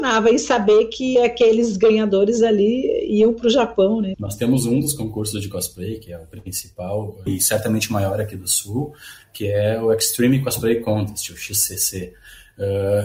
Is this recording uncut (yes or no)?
no